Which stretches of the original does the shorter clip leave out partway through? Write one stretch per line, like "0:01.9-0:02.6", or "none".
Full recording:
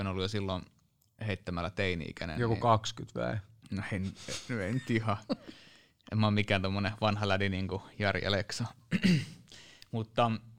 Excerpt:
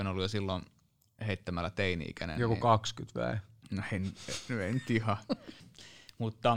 0:05.6-0:09.3